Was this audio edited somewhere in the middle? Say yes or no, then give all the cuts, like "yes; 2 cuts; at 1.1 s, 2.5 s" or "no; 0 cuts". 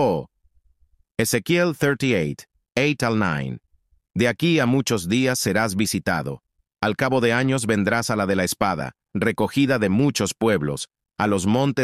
no; 0 cuts